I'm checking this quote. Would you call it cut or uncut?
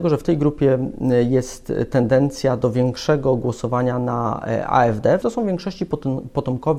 cut